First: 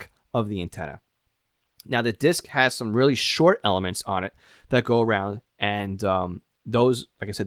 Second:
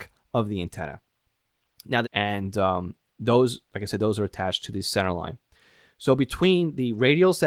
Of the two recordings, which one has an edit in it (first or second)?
second